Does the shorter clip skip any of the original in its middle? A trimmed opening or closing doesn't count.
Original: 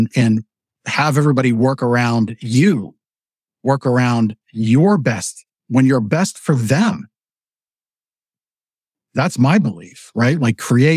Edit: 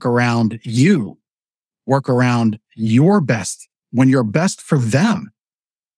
no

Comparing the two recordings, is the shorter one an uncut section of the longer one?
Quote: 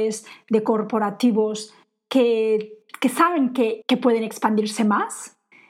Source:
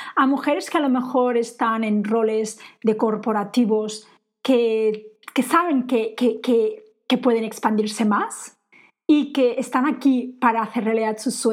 no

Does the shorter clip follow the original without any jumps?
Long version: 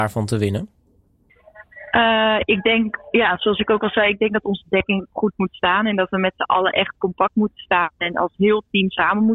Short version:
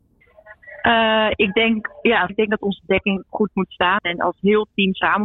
no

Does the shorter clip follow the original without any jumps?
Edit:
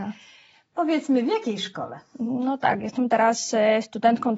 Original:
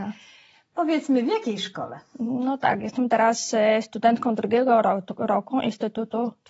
yes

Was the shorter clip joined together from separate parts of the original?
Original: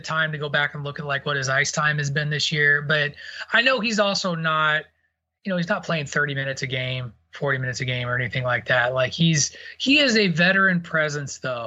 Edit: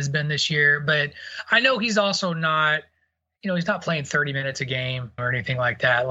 yes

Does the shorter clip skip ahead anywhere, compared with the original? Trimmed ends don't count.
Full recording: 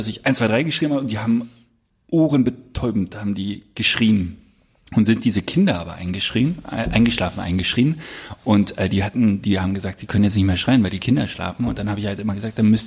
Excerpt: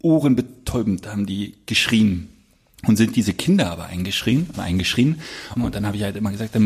yes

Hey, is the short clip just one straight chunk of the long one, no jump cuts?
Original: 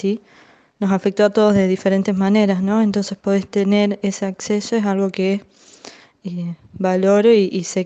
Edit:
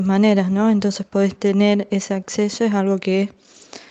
yes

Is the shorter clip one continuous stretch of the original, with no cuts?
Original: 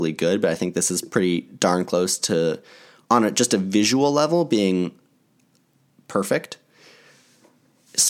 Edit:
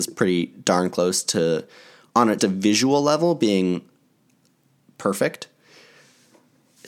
no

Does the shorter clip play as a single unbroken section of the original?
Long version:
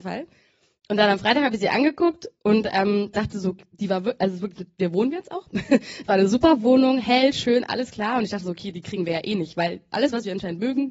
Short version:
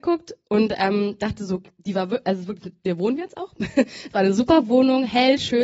yes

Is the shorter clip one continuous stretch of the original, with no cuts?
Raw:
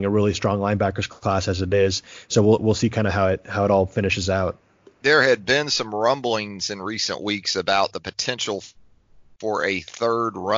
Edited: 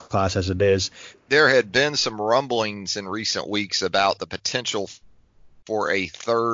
no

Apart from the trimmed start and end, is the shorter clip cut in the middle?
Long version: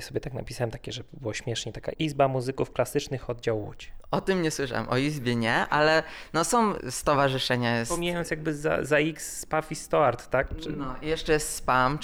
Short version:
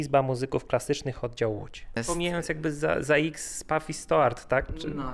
yes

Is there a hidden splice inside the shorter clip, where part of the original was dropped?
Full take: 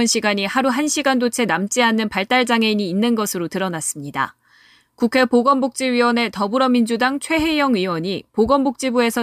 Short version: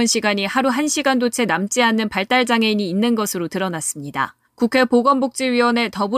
yes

